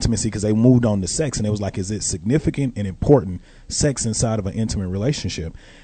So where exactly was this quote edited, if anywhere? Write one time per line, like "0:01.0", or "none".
none